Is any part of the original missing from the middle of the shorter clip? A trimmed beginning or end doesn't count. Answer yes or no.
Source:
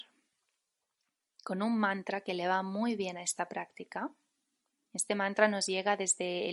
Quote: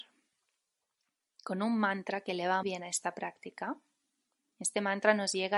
yes